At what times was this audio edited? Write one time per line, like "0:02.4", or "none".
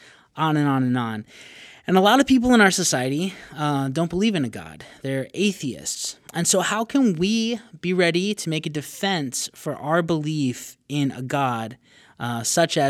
none

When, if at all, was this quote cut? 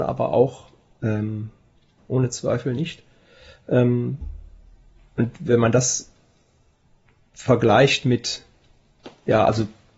0:02.0

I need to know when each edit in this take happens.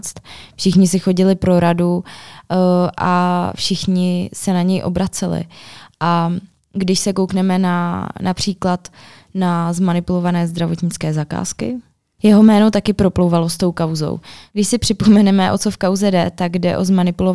none

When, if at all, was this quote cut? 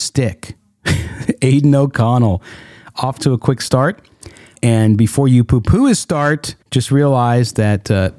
0:04.5
0:06.6

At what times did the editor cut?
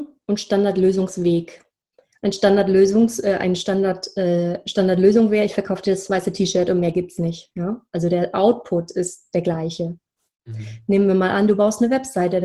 0:10.4

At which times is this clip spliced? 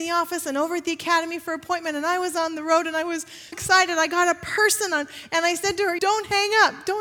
0:03.5
0:06.0

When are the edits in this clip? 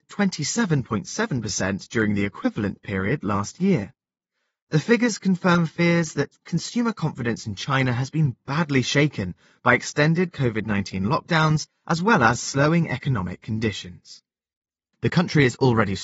0:14.9

